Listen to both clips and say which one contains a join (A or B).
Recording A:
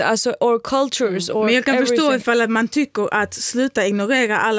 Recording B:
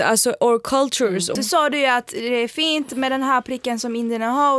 B